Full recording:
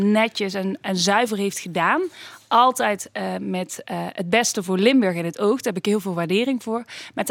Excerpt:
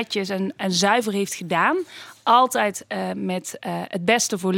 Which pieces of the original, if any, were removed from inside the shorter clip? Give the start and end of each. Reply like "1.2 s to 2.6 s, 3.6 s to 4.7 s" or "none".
none